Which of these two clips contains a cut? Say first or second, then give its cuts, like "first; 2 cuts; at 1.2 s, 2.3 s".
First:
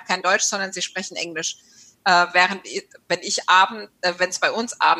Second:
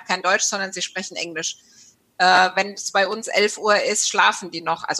first; 1 cut; at 2.0 s